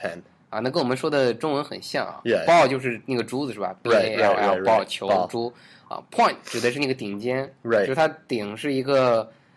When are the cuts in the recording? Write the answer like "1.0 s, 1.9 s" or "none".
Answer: none